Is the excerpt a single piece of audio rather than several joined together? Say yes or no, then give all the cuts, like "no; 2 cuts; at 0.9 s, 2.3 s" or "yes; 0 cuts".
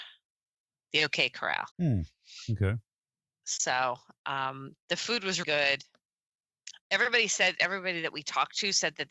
no; 3 cuts; at 1.7 s, 3.4 s, 5.4 s